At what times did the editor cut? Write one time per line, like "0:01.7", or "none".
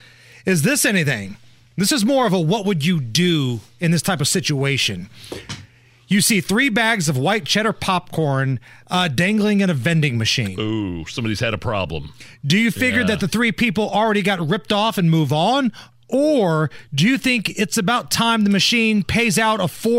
none